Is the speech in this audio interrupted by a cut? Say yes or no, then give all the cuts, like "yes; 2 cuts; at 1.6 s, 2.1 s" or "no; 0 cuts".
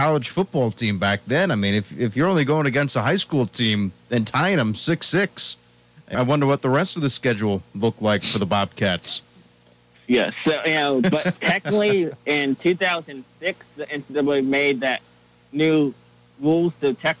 yes; 1 cut; at 6.1 s